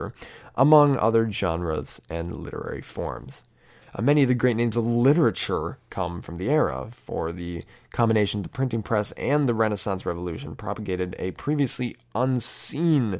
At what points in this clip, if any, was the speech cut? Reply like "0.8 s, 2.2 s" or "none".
3.8 s